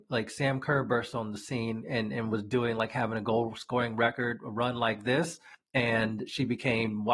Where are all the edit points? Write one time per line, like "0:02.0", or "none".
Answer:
none